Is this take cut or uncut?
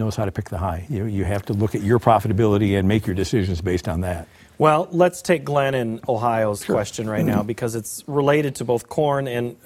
uncut